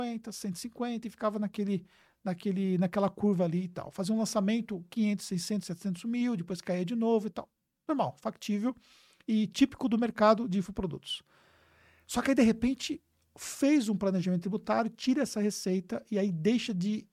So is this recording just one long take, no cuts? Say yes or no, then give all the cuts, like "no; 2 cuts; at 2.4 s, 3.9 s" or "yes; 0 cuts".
yes; 0 cuts